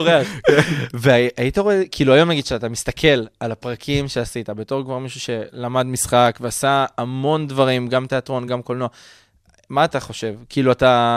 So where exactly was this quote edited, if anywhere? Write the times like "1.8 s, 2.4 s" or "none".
none